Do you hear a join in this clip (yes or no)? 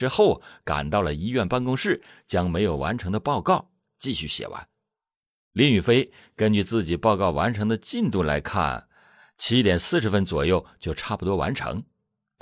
no